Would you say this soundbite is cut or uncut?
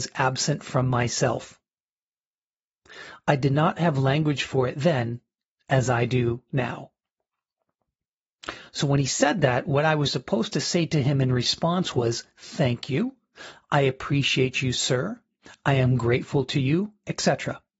uncut